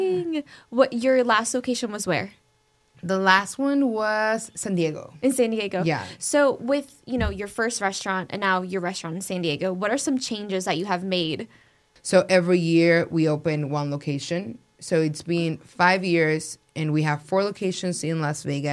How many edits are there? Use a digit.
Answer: 1